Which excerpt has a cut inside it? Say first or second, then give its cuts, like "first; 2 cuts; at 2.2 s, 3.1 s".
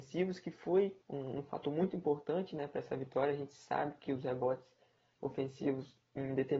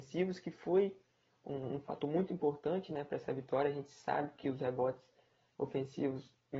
first; 1 cut; at 1.0 s